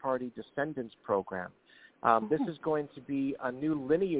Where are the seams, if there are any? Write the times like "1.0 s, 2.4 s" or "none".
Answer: none